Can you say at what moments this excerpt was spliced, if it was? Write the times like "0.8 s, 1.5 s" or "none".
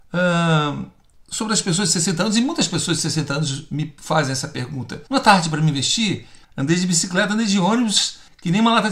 5.1 s, 6.4 s